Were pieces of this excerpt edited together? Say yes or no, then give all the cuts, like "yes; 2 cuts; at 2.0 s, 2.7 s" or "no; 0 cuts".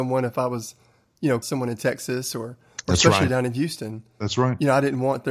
yes; 1 cut; at 1.4 s